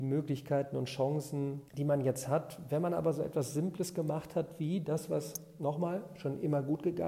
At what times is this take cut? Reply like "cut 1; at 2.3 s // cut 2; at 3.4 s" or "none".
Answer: cut 1; at 1.7 s